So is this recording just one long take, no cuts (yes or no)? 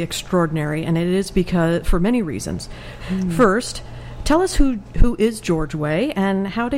no